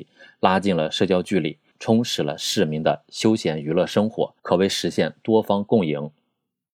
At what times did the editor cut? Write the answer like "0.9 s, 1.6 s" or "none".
1.7 s, 4.4 s